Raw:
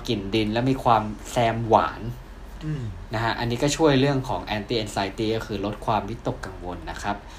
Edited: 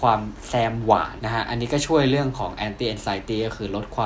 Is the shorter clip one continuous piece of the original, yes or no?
no